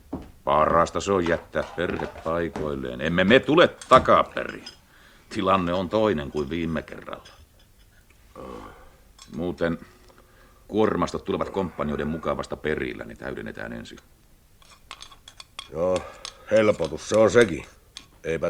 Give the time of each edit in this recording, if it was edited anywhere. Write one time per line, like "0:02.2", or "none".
none